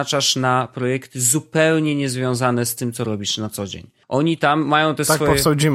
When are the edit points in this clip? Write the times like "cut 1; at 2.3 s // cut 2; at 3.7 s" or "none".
cut 1; at 4.0 s